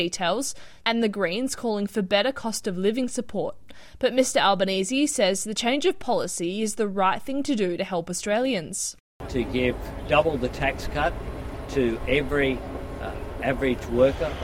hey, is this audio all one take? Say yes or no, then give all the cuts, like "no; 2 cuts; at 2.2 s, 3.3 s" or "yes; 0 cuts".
yes; 0 cuts